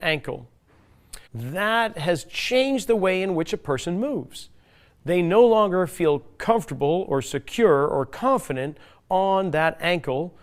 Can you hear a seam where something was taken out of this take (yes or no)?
yes